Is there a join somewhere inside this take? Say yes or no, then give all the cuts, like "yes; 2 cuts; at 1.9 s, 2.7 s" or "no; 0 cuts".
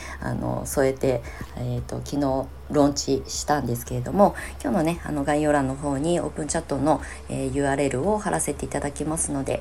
no; 0 cuts